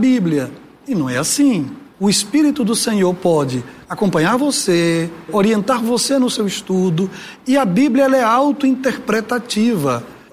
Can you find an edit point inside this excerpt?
no; 0 cuts

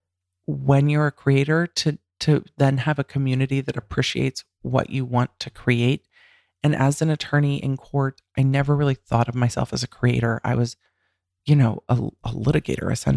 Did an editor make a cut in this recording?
no; 0 cuts

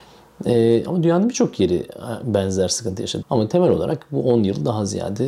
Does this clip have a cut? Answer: yes; 1 cut; at 3.2 s

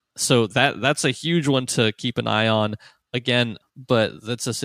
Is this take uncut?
no; 1 cut; at 3.6 s

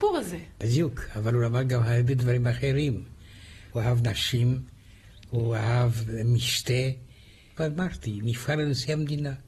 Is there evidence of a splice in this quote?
yes; 2 cuts; at 3.7 s, 7.6 s

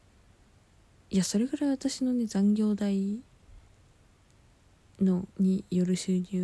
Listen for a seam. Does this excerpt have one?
yes; 1 cut; at 5.3 s

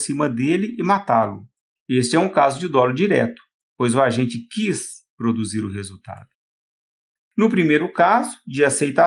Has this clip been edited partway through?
yes; 1 cut; at 7.2 s

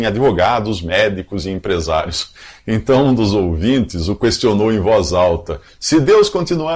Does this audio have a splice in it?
no; 0 cuts

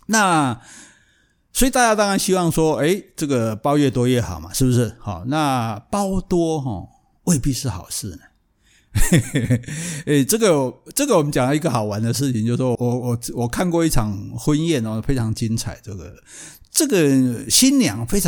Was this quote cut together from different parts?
yes; 1 cut; at 12.8 s

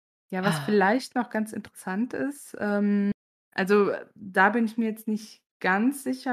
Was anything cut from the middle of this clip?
no; 0 cuts

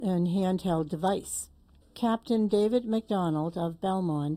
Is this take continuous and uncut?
no; 1 cut; at 1.8 s

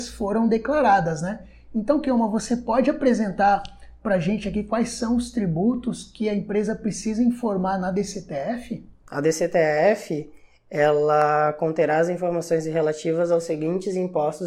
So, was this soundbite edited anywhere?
no; 0 cuts

